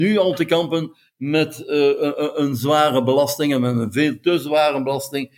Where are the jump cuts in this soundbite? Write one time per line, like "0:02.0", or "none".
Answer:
none